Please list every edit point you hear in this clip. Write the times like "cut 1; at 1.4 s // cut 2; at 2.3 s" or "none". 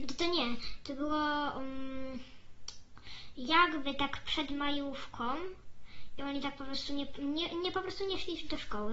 none